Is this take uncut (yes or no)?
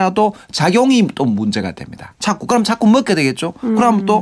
no